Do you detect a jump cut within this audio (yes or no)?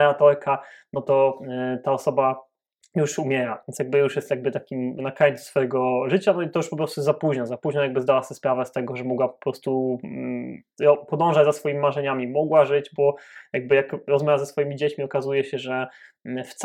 no